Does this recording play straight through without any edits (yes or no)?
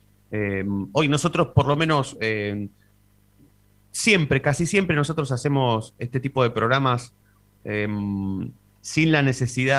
yes